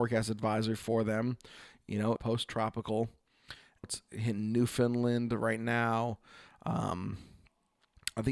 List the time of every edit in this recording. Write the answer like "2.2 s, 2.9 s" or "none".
2.2 s, 3.8 s